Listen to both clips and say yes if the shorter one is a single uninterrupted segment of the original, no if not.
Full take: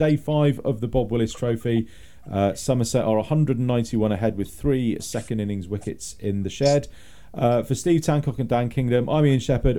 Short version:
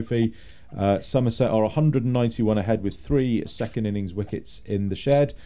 yes